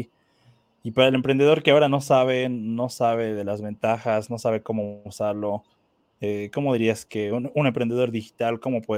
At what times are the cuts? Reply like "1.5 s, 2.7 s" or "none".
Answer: none